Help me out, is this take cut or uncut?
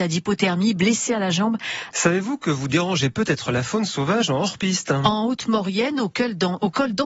cut